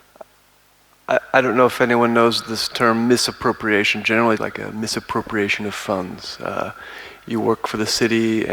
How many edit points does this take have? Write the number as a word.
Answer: one